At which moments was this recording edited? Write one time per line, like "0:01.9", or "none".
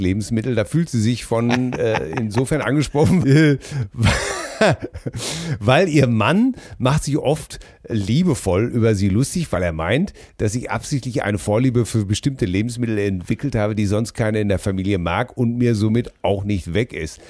0:03.2